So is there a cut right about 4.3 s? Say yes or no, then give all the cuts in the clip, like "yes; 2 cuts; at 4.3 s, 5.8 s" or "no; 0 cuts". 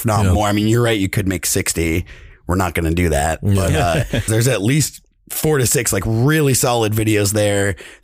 yes; 1 cut; at 4.3 s